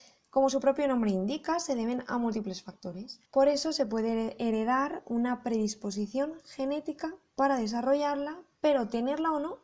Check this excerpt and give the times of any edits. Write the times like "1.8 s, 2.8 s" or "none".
3.3 s